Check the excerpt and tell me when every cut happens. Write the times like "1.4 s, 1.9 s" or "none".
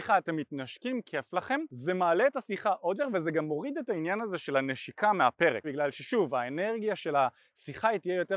3.0 s, 5.6 s